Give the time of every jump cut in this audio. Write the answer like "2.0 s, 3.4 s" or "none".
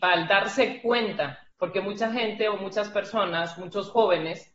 none